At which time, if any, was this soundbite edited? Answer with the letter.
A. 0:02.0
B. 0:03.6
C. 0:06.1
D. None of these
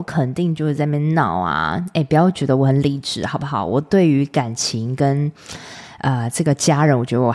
D